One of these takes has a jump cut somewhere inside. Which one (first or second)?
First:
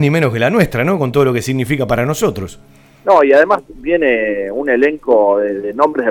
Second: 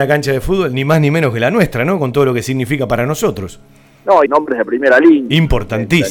second